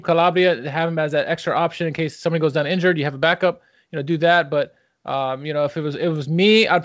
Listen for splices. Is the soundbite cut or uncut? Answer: uncut